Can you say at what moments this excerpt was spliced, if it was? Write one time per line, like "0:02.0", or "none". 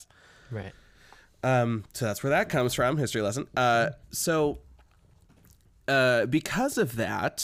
none